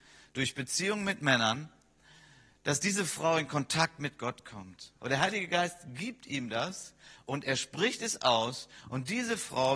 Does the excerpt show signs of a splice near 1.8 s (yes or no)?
no